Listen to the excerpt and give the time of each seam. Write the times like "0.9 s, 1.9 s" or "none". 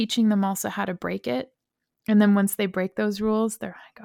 none